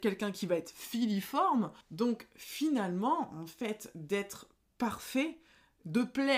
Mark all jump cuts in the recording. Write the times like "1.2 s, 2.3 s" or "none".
1.8 s